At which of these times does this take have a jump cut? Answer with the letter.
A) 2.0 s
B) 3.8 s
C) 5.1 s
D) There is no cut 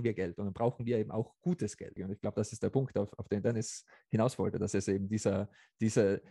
A